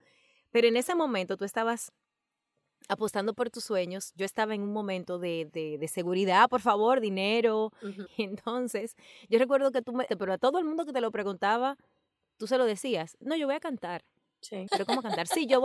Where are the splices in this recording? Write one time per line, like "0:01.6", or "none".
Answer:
0:08.1
0:10.1
0:14.7